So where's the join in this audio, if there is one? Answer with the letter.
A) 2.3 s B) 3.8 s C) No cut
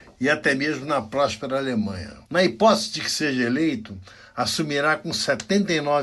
A